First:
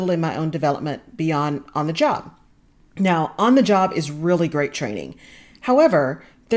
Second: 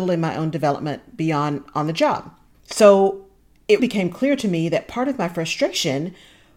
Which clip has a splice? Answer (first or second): second